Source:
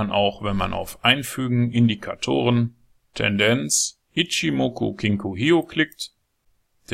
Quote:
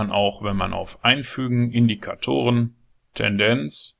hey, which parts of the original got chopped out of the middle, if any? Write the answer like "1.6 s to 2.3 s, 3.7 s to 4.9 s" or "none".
none